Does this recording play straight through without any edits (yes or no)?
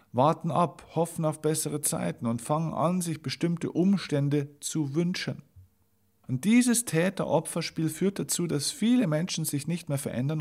no